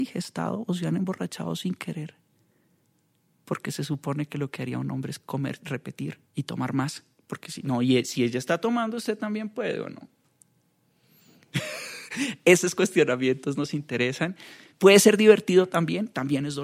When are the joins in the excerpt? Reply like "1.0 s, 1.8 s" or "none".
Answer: 6.3 s

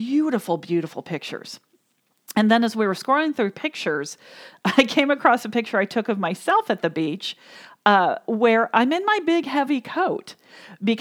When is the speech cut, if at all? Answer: none

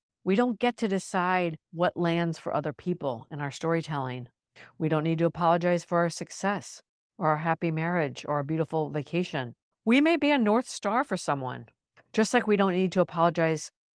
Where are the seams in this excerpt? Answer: 1.6 s

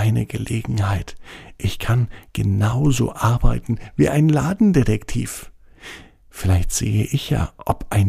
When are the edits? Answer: none

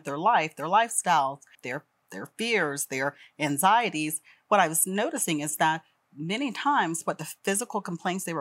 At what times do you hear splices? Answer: 1.5 s

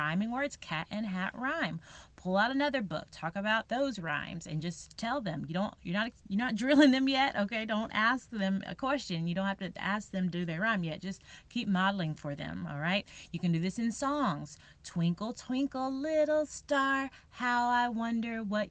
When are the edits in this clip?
3.7 s

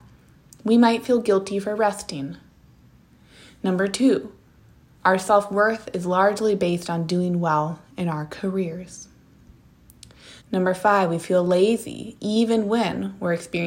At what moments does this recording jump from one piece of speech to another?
10.4 s

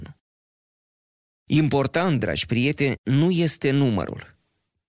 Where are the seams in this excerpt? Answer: none

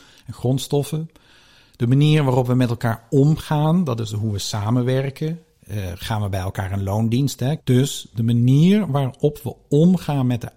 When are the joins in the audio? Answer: 7.6 s

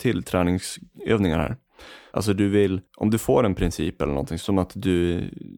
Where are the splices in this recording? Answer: 2.1 s, 4.4 s

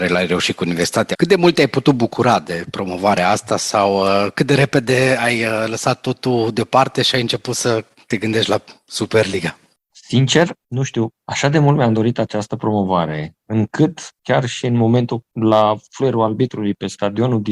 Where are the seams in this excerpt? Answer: 1.1 s

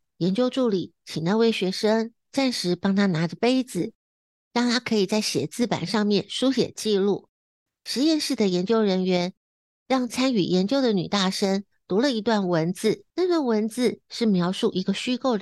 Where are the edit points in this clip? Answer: 7.7 s, 13.1 s

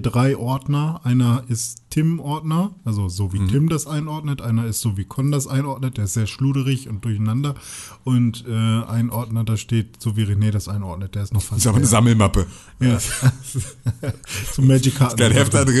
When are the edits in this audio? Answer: none

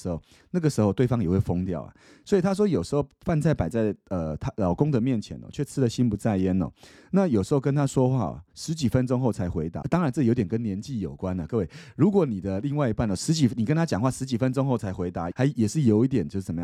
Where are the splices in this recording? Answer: 9.8 s, 15.3 s

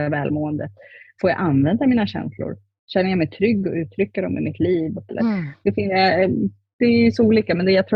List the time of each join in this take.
5.1 s

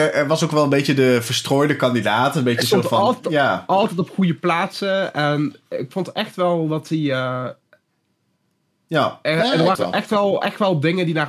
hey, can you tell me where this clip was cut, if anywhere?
9.8 s

